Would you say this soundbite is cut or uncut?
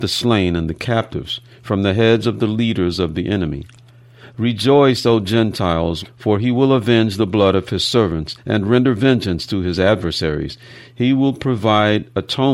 cut